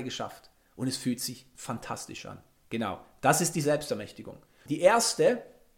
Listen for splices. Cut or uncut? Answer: cut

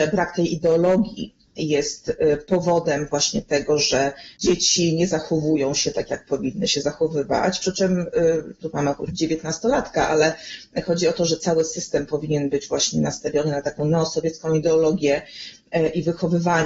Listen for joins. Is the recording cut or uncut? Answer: uncut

